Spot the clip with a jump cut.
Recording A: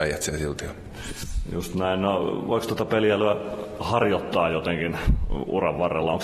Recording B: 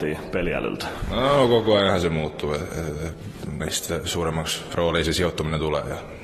B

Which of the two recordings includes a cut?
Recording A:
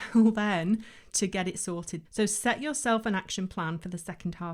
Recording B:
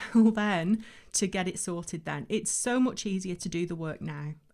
A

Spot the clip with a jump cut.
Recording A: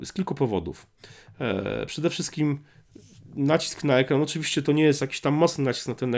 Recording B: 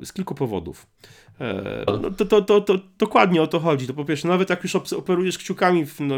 B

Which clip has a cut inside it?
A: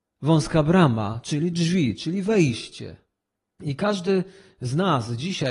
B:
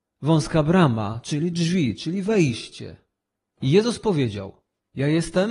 B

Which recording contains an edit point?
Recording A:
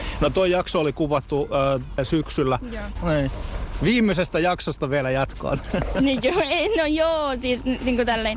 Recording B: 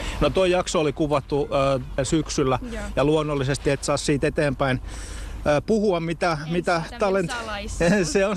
A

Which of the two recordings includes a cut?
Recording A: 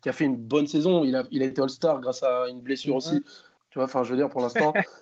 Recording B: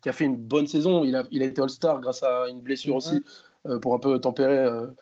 A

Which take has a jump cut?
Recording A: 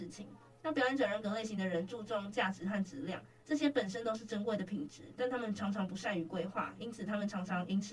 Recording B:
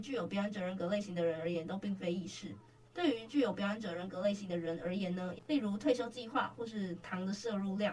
B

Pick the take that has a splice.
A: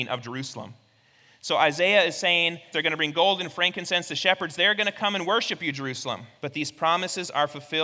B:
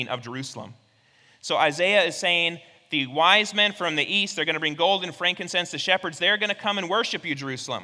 A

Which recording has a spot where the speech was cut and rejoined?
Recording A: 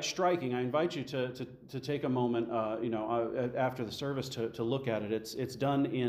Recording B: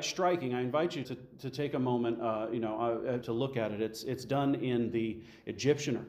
B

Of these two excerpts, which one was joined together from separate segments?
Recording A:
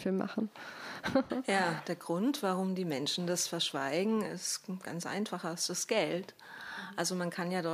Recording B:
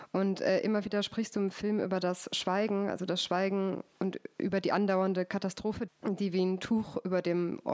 B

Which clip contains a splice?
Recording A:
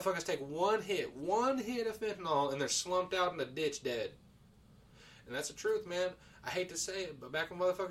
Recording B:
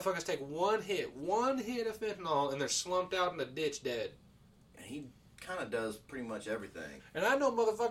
B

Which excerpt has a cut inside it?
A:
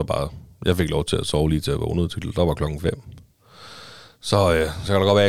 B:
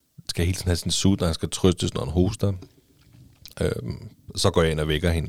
B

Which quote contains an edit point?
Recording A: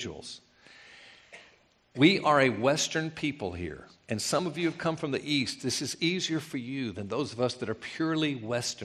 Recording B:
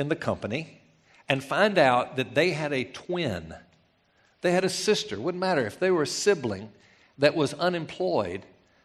B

